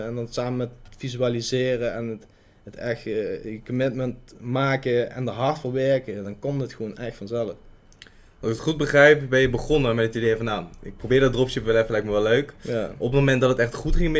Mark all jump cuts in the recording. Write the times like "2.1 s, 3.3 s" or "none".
11.0 s